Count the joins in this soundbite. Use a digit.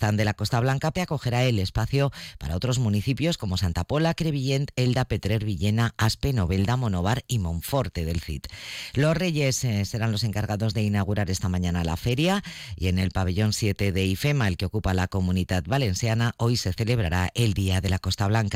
1